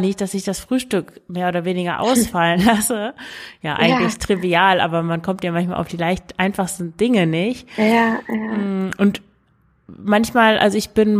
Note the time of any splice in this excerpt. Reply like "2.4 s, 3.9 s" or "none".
none